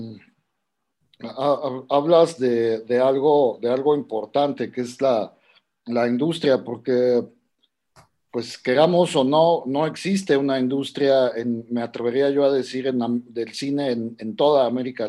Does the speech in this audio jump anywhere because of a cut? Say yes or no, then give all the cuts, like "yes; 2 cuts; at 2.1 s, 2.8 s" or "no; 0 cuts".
no; 0 cuts